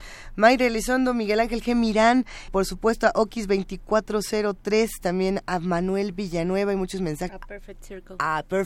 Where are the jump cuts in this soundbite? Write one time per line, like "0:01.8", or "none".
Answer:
0:02.5
0:05.0
0:07.3